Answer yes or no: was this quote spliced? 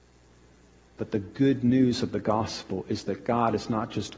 no